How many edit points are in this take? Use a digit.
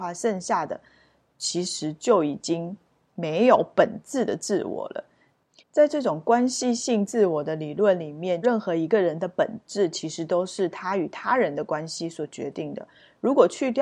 2